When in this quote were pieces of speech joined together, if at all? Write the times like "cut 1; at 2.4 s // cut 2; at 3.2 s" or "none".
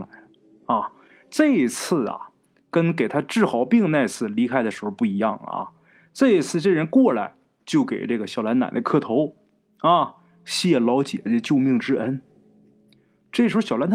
none